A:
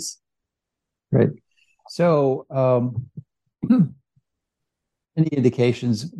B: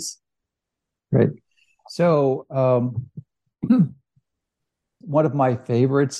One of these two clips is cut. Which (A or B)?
B